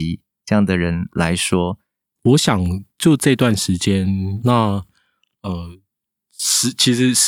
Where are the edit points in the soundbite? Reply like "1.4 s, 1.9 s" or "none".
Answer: 2.2 s, 4.4 s